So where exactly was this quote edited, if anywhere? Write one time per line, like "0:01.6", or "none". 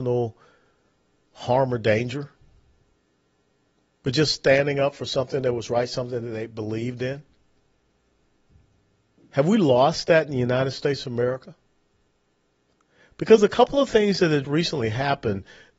0:14.4